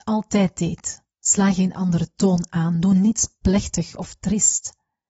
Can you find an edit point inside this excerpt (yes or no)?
yes